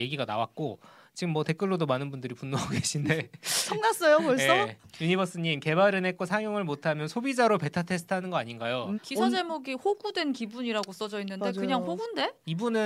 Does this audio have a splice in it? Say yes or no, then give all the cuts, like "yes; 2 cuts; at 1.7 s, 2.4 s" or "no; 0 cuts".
yes; 1 cut; at 8.9 s